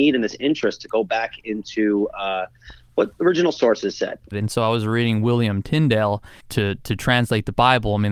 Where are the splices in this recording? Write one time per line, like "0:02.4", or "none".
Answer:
0:04.3
0:06.4